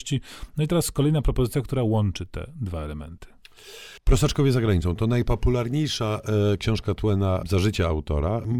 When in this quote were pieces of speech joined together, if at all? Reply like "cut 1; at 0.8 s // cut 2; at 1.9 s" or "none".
none

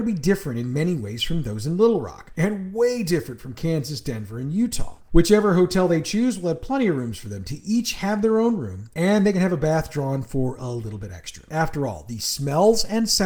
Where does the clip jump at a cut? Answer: cut 1; at 5.0 s // cut 2; at 11.5 s

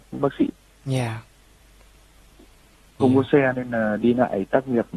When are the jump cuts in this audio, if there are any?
cut 1; at 3.0 s

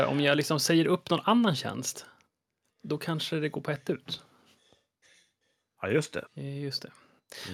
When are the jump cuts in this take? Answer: cut 1; at 6.3 s

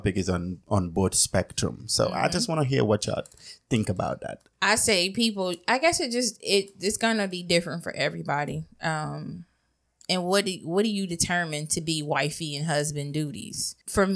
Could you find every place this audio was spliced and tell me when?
none

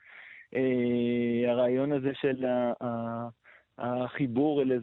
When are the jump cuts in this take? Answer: none

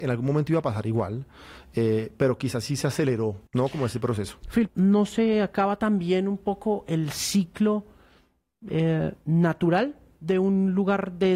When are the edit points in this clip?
cut 1; at 3.5 s // cut 2; at 4.7 s

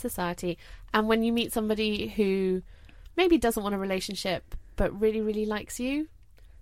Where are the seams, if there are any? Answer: none

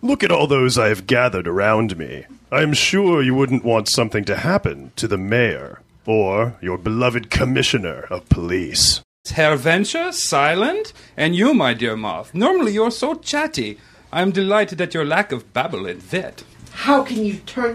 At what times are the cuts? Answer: cut 1; at 9.2 s

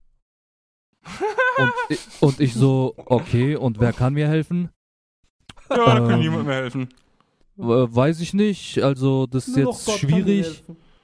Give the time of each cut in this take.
none

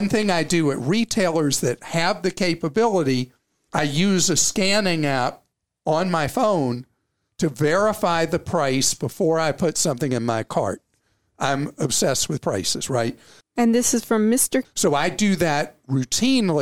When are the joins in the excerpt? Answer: cut 1; at 13.4 s // cut 2; at 14.6 s

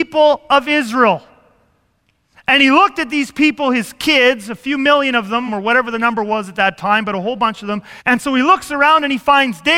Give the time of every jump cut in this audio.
cut 1; at 5.5 s // cut 2; at 8.0 s

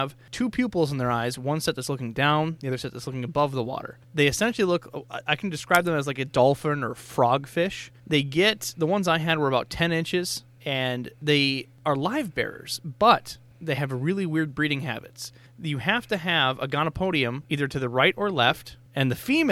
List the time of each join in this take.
cut 1; at 17.4 s

